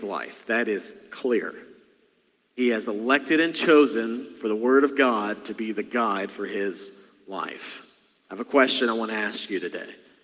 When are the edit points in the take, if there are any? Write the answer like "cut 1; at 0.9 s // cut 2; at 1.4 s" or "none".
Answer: none